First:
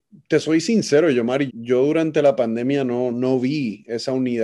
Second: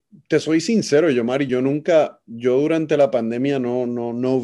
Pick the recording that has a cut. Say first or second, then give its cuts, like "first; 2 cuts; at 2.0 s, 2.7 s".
first; 2 cuts; at 1.5 s, 3.1 s